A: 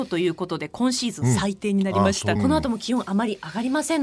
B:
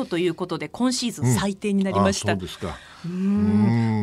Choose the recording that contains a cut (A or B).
A